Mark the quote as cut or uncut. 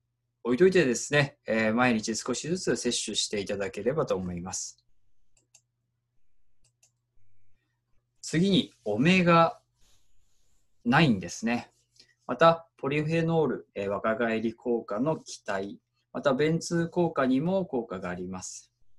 cut